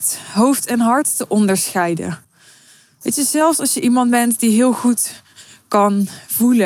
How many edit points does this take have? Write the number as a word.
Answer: zero